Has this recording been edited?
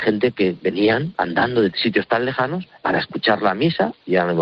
yes; 1 cut; at 2.8 s

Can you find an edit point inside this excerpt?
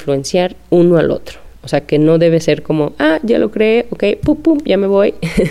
no; 0 cuts

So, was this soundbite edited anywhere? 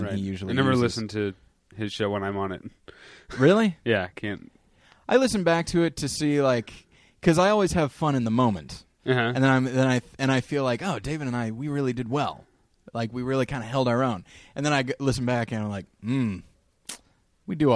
no; 0 cuts

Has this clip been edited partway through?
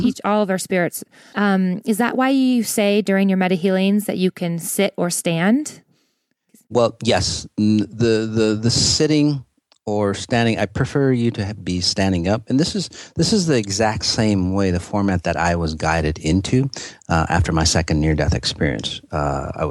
yes; 1 cut; at 1.3 s

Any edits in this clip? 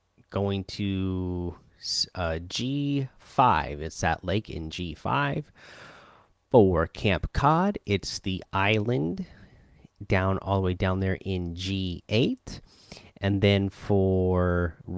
no; 0 cuts

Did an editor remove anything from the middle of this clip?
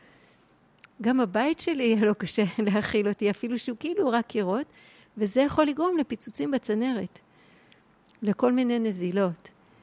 no; 0 cuts

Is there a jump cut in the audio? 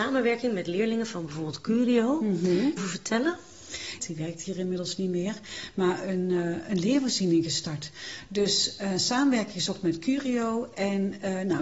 yes; 2 cuts; at 2.8 s, 4.0 s

